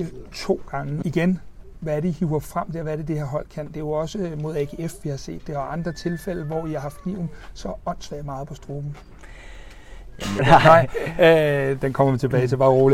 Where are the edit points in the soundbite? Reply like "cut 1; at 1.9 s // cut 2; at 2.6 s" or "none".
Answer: cut 1; at 1.0 s // cut 2; at 10.4 s